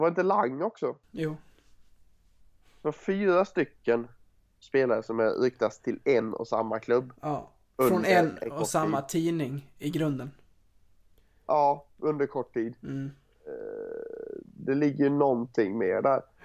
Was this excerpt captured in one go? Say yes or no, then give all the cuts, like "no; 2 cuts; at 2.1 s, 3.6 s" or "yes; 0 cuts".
yes; 0 cuts